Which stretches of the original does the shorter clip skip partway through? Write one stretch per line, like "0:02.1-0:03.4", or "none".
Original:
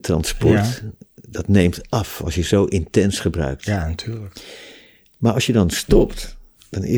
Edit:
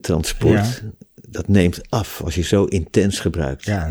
none